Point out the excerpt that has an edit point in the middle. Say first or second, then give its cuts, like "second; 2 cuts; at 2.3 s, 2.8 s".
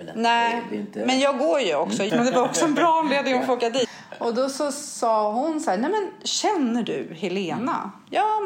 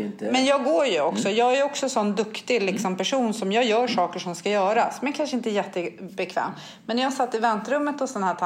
first; 2 cuts; at 2.1 s, 3.8 s